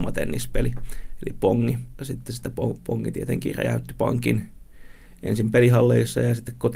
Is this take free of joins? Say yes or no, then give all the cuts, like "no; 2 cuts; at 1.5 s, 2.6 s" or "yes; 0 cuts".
yes; 0 cuts